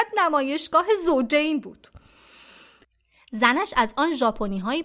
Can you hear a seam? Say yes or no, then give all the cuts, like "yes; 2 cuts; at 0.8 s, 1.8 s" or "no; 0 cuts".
no; 0 cuts